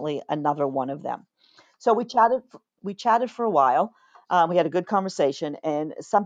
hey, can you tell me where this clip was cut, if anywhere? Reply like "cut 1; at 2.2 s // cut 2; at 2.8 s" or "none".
none